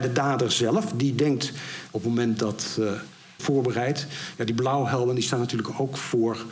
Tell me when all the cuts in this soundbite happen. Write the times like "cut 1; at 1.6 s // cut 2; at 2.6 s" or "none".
cut 1; at 1.9 s // cut 2; at 3.4 s

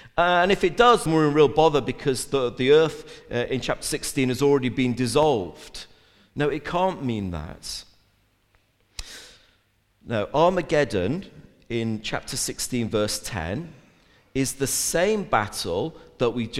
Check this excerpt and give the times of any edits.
cut 1; at 1.1 s

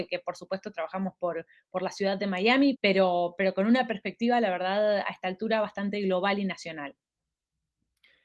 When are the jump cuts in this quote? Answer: cut 1; at 2.7 s

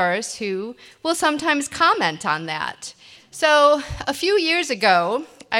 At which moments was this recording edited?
cut 1; at 3.2 s

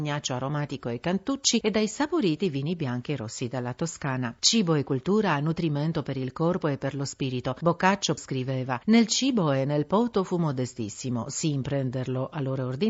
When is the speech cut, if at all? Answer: cut 1; at 8.2 s

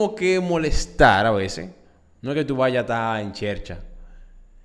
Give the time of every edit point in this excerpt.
cut 1; at 2.2 s

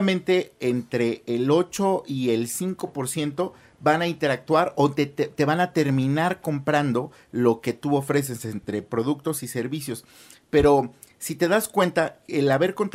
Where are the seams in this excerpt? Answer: none

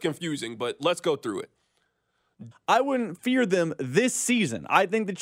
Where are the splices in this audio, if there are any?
cut 1; at 2.5 s

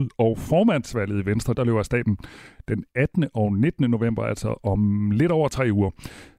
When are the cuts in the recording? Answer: cut 1; at 1.5 s

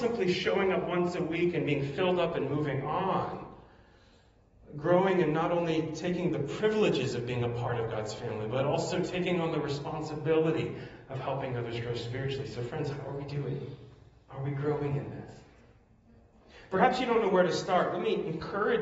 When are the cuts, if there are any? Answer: none

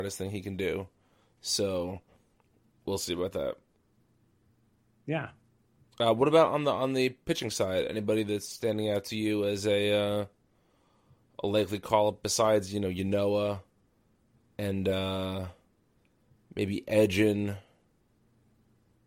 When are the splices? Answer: none

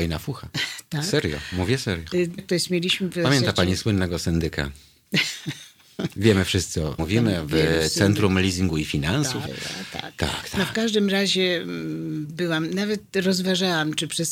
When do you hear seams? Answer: cut 1; at 2.4 s // cut 2; at 7.0 s // cut 3; at 9.5 s

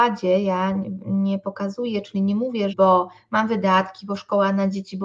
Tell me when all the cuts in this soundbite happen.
cut 1; at 2.7 s

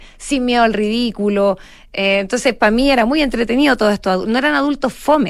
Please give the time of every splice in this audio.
none

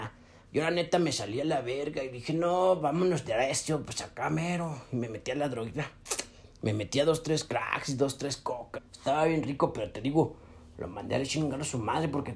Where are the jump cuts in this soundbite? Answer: cut 1; at 8.7 s

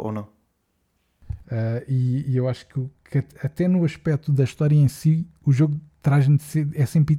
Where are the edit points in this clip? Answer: cut 1; at 1.4 s

